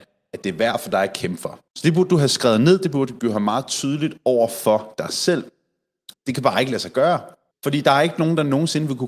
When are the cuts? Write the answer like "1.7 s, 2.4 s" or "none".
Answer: 1.7 s, 6.1 s, 7.5 s